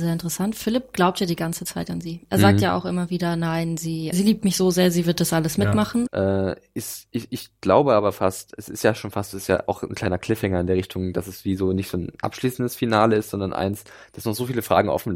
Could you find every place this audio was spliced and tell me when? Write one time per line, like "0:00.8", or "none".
0:04.1
0:06.1